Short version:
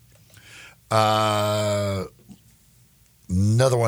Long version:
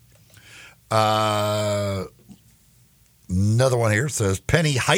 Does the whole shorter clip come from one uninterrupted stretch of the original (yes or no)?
yes